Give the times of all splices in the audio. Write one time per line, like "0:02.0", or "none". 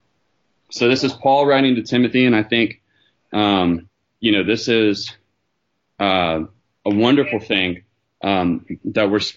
none